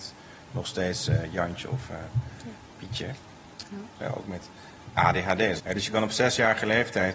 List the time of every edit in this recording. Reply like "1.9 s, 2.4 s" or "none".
4.0 s, 5.6 s